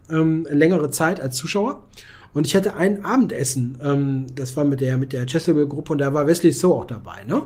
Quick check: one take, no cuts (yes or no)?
yes